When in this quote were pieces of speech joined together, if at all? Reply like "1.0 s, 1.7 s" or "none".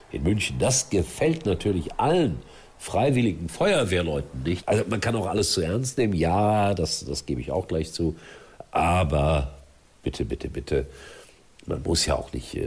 4.6 s